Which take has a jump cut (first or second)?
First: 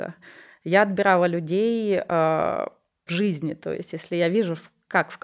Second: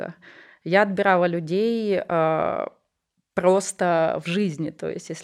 first